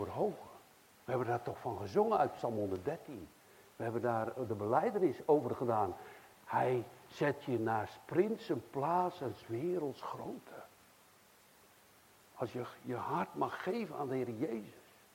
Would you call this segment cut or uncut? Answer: uncut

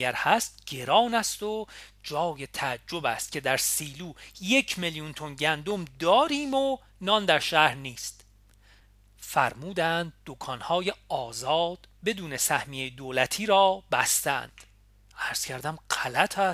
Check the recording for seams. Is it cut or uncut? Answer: uncut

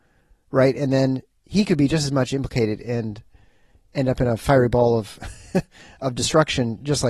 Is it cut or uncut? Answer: uncut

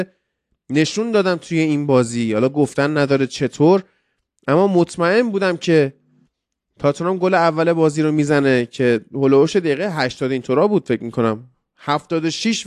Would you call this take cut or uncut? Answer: uncut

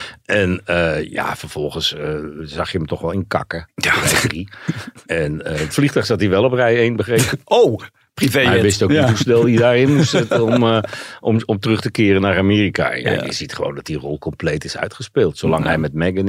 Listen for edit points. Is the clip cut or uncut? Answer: uncut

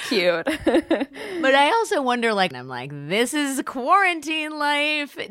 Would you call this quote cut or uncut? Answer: cut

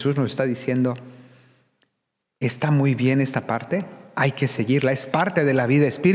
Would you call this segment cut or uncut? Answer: uncut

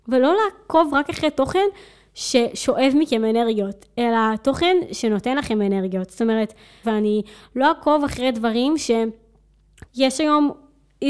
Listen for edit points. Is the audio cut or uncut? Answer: cut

